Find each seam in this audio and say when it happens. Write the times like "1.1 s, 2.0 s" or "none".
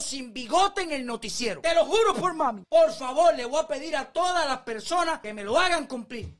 2.6 s